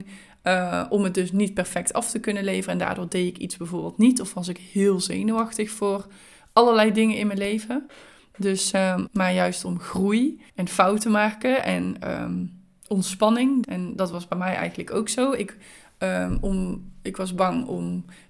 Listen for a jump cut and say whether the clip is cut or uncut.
cut